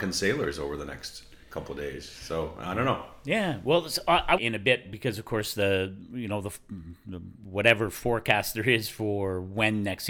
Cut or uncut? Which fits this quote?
cut